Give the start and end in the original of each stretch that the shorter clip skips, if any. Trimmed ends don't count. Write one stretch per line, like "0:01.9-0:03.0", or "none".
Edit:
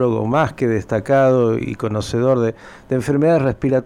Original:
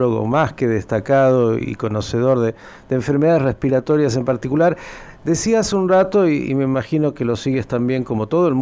none

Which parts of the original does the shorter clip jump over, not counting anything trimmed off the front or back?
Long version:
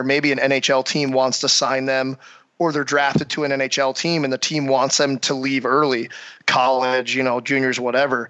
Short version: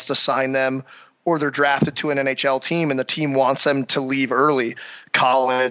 none

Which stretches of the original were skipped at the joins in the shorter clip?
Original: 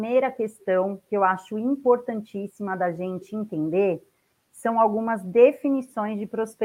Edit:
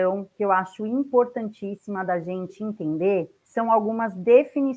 0:04.2-0:04.5

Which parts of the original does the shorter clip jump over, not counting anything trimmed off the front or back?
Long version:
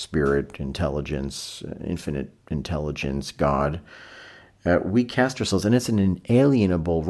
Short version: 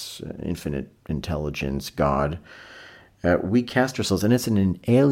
none

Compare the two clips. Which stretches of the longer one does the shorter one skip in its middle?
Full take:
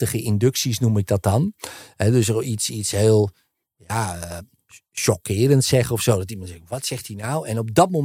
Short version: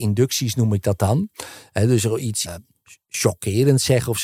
0:02.7-0:04.3

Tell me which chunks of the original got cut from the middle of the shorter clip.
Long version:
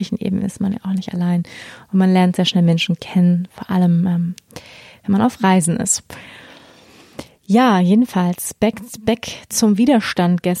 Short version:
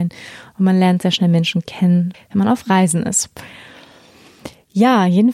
0:03.5-0:04.9

